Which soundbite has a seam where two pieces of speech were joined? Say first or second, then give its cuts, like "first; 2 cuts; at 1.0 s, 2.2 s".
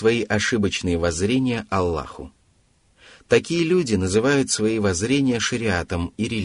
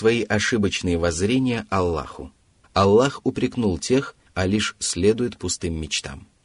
second; 2 cuts; at 2.6 s, 4.3 s